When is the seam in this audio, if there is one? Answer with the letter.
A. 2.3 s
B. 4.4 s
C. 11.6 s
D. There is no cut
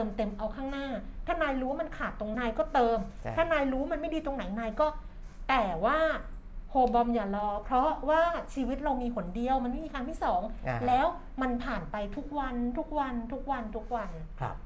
A